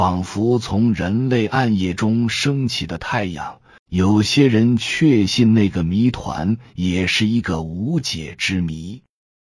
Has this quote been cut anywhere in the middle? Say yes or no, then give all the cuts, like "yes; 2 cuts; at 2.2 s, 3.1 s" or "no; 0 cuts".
yes; 1 cut; at 3.8 s